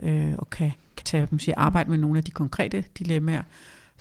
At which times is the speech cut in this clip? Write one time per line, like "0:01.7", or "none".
0:01.0